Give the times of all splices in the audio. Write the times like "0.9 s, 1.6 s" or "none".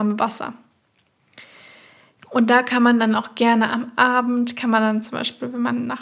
2.2 s